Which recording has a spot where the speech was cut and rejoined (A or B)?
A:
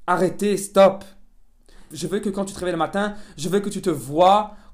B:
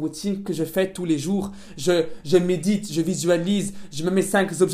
A